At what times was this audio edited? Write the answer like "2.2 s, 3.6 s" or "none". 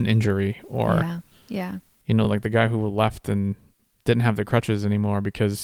none